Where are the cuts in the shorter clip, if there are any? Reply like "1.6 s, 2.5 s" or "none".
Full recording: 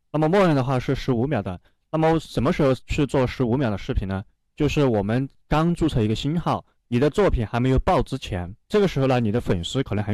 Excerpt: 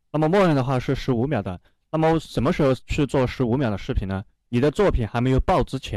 4.4 s